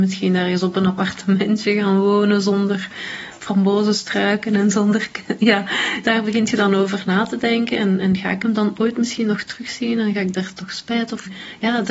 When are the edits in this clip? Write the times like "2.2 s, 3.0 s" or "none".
6.0 s